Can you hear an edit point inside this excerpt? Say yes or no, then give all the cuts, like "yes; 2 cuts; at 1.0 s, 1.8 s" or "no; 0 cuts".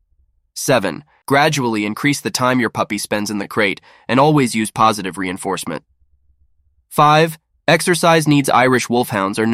yes; 1 cut; at 1.2 s